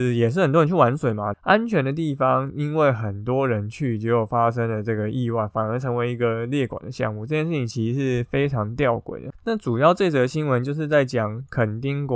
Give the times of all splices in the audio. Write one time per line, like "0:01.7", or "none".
0:01.3
0:09.3